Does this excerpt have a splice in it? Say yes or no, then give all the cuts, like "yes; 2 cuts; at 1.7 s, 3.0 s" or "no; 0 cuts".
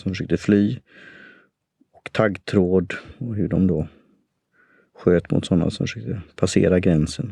no; 0 cuts